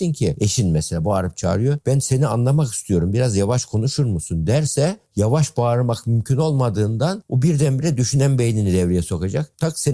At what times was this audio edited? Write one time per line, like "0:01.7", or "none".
none